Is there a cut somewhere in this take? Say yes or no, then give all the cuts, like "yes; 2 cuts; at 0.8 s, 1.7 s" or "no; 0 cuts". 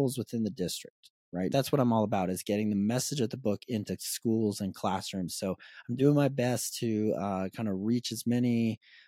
yes; 1 cut; at 1.5 s